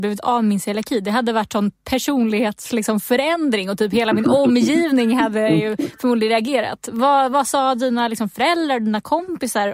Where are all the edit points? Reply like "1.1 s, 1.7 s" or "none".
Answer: none